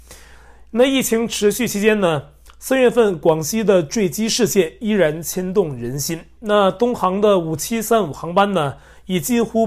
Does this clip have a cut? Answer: no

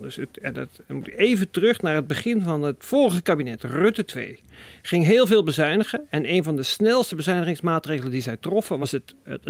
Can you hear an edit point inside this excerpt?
no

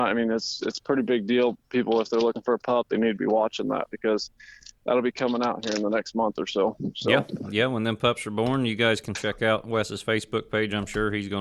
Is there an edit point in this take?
no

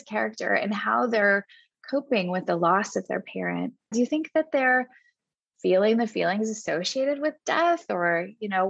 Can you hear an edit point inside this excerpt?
yes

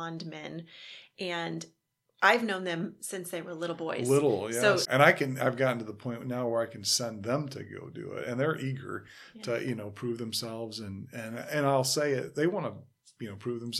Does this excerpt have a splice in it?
yes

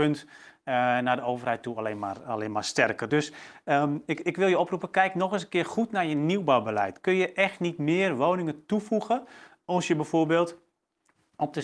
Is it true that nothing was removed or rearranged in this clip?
yes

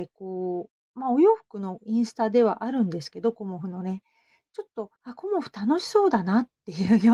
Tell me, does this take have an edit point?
yes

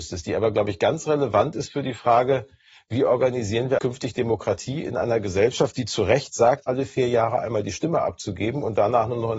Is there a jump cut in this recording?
yes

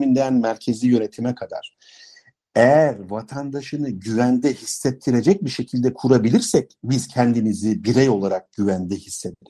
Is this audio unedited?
yes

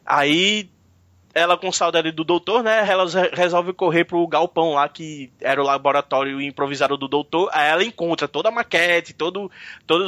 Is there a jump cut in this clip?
no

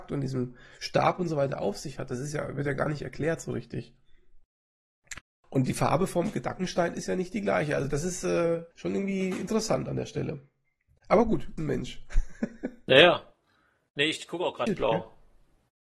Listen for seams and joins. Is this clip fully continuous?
no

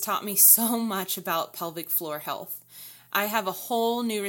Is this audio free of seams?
yes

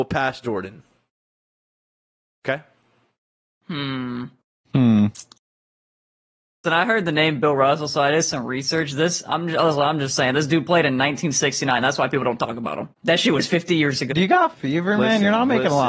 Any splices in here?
yes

